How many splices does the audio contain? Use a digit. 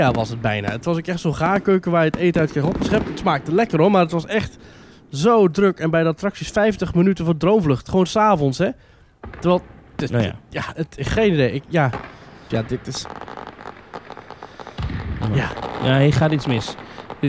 1